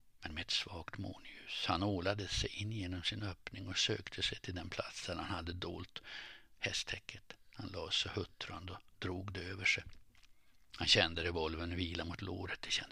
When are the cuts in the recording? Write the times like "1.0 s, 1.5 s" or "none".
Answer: none